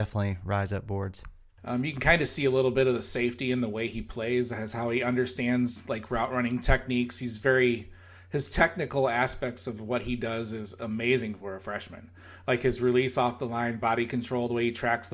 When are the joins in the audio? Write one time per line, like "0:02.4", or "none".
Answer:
0:01.6